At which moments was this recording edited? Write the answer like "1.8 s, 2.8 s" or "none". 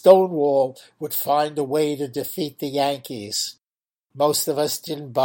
none